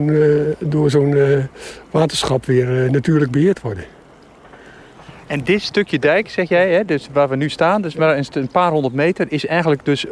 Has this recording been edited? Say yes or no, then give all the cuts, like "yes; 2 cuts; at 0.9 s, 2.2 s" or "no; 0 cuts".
no; 0 cuts